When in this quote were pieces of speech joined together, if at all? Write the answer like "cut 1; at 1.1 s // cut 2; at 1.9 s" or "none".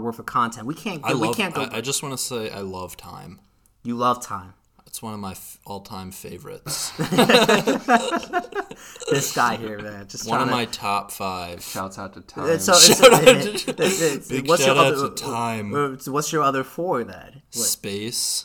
none